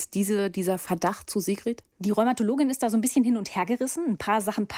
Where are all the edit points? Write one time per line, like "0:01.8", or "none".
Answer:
0:01.9